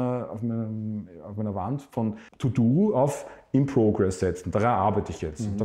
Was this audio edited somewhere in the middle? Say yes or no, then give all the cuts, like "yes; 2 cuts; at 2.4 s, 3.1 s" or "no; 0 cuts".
yes; 1 cut; at 2.3 s